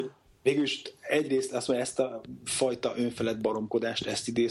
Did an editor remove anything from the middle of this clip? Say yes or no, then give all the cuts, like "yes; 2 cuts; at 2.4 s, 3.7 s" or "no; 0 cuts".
no; 0 cuts